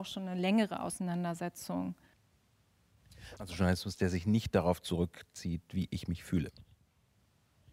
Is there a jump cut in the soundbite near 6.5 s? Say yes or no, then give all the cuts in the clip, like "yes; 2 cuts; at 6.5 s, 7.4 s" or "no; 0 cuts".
no; 1 cut; at 3.4 s